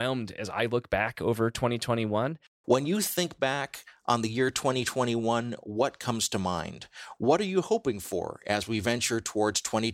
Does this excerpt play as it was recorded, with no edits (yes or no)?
no